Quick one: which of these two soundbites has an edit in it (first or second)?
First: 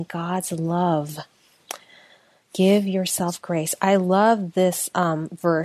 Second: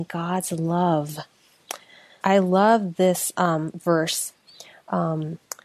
second